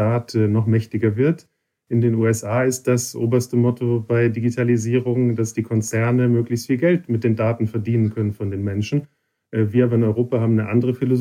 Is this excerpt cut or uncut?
uncut